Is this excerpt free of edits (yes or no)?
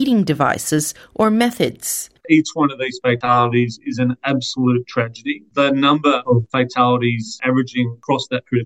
no